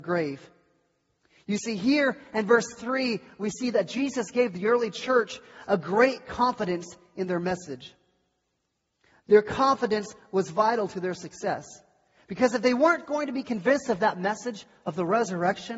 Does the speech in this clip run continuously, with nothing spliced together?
yes; 0 cuts

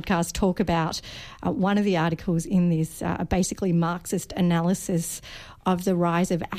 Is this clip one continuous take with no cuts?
yes; 0 cuts

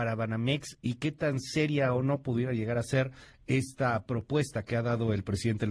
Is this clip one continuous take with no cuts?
yes; 0 cuts

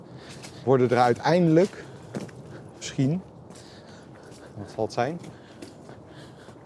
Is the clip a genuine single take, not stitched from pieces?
yes; 0 cuts

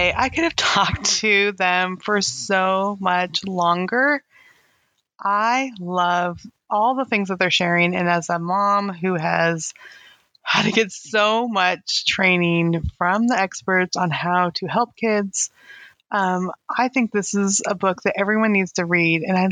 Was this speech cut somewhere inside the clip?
no; 0 cuts

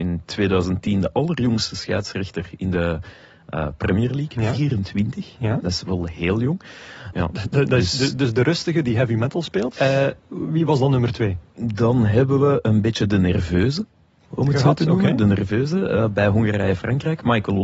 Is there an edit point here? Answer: yes; 2 cuts; at 7.1 s, 9.8 s

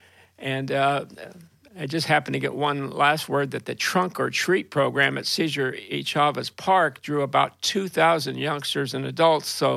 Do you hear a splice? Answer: no; 0 cuts

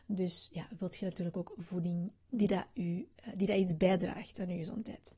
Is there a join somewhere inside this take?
yes; 1 cut; at 2.2 s

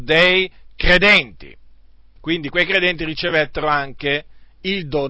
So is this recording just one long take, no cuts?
no; 1 cut; at 2.2 s

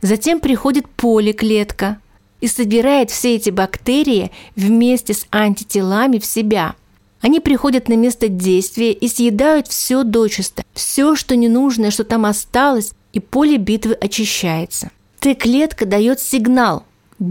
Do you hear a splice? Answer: yes; 1 cut; at 15.1 s

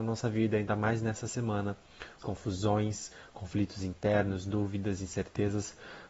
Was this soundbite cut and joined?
yes; 1 cut; at 2.2 s

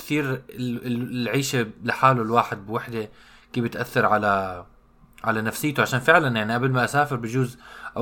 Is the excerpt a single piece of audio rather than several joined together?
yes; 0 cuts

